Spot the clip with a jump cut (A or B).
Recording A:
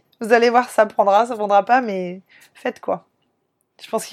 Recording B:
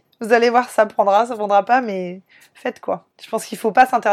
B